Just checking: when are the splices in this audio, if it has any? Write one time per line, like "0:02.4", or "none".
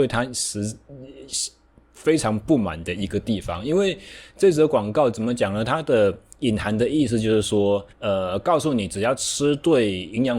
0:07.9